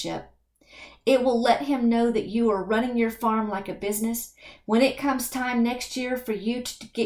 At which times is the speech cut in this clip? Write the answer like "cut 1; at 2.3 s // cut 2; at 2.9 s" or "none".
none